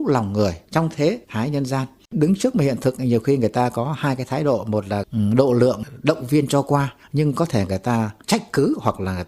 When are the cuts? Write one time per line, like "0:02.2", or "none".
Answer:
0:02.0